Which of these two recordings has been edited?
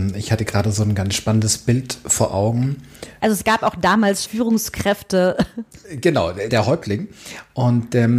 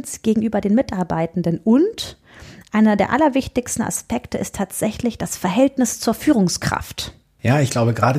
first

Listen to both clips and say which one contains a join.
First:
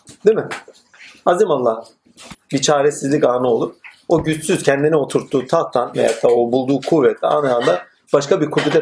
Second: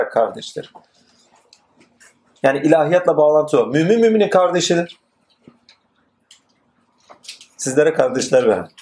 first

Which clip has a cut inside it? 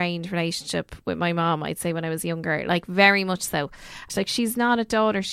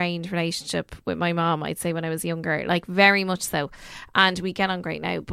first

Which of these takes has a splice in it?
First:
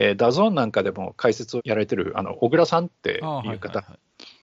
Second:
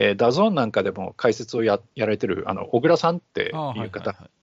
first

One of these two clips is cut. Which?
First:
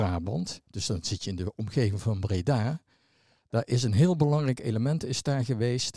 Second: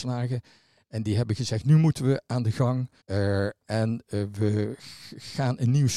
second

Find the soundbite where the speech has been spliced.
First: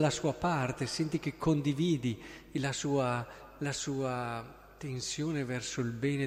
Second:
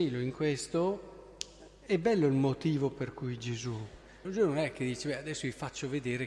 second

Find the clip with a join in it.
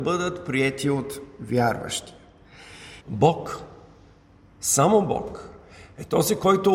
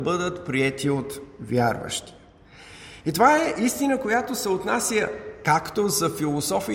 first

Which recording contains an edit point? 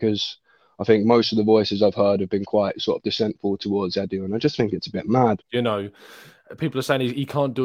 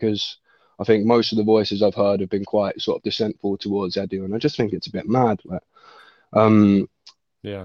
first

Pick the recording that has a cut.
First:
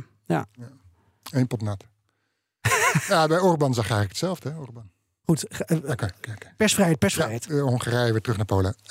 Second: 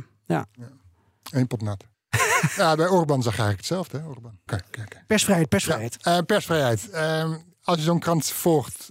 second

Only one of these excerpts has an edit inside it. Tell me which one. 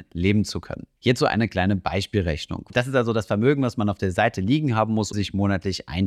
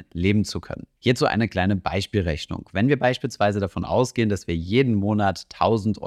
first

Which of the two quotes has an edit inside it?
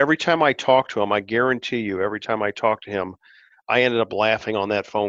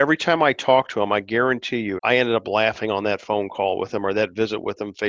second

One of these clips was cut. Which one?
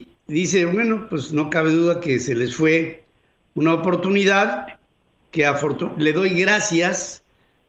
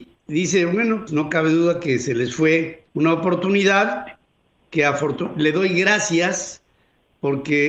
second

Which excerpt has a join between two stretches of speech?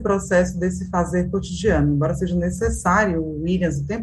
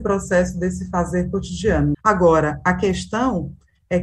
second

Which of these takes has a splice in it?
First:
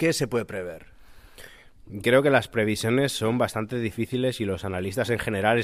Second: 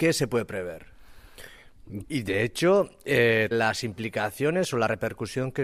second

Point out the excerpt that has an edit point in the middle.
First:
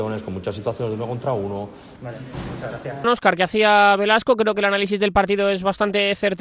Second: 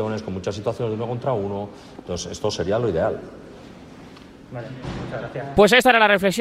first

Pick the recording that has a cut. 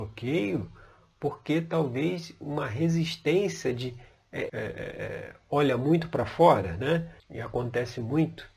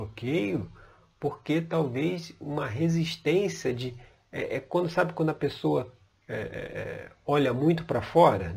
first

